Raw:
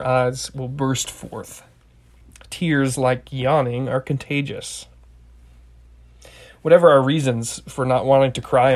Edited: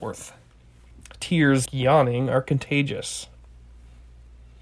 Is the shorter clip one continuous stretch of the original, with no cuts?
no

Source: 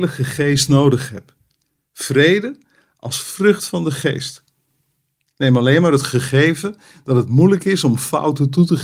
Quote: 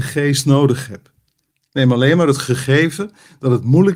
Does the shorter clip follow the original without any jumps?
no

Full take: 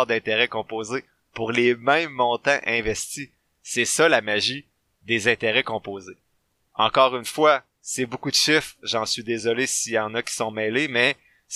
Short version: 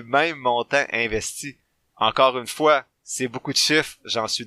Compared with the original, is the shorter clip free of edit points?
no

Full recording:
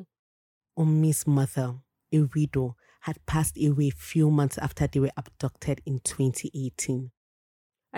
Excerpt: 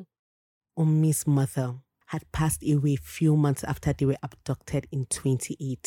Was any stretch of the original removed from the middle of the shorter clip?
yes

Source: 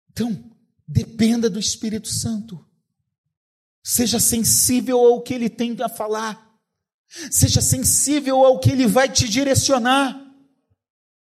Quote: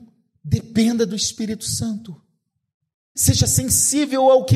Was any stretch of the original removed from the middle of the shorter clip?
yes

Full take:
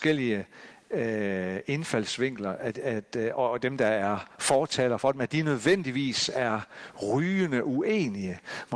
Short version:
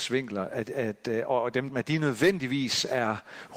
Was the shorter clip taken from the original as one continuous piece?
no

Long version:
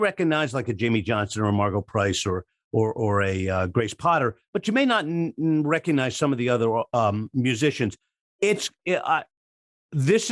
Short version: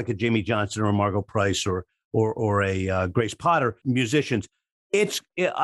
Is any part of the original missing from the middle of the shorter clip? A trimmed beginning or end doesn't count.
yes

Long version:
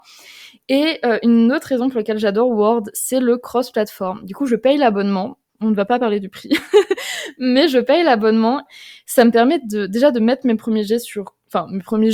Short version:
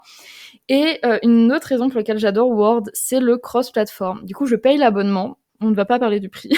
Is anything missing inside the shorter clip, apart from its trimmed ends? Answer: no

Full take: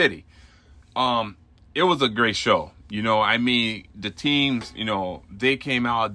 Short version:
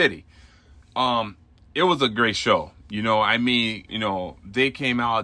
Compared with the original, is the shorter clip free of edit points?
no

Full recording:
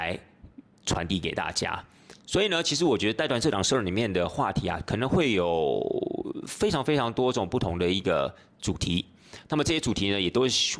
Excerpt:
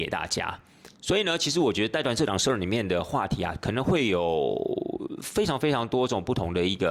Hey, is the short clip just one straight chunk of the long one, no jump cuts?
yes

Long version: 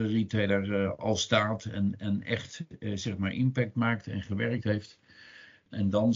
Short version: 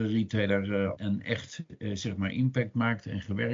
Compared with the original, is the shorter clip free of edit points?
no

